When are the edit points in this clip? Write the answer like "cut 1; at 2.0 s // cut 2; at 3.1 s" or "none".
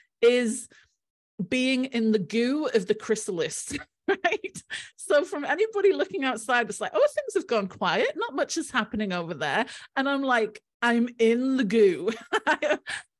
none